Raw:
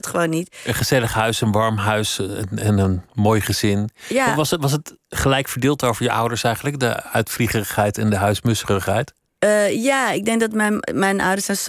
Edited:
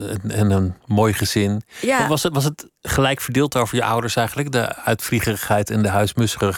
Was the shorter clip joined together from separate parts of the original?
no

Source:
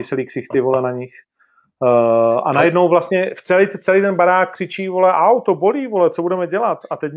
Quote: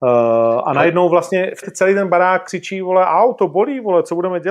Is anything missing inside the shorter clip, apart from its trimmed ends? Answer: yes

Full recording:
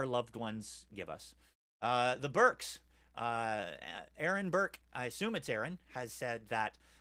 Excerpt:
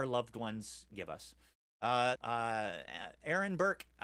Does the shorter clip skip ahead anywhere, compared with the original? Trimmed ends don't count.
yes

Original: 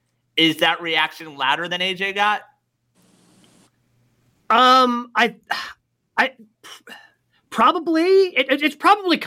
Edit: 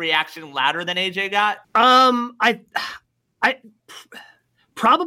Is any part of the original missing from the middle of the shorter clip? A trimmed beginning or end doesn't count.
yes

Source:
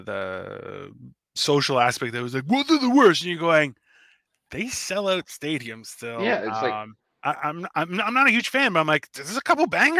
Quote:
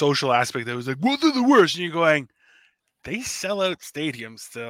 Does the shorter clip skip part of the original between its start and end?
no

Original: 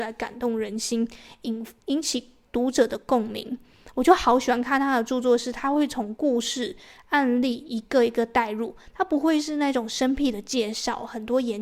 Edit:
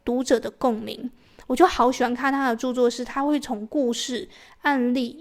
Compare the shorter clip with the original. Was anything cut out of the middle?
no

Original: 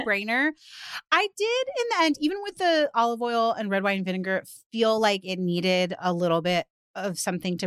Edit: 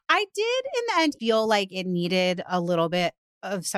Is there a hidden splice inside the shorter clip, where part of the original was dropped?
yes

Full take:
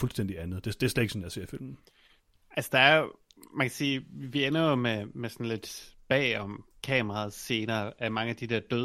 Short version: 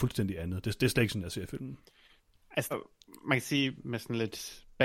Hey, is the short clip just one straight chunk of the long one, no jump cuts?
no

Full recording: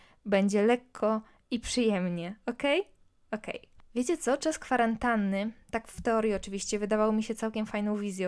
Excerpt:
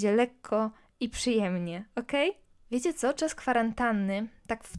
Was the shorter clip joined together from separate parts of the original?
yes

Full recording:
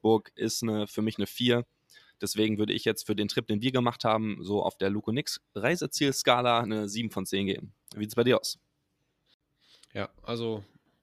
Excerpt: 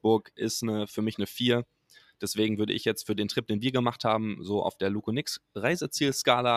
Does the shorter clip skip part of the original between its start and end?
no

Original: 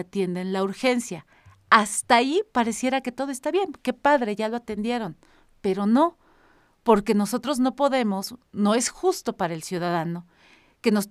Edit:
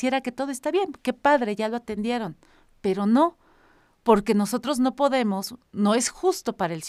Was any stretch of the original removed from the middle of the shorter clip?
no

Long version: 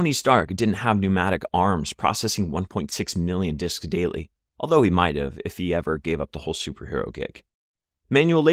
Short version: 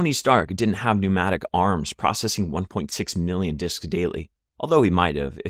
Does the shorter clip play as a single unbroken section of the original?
yes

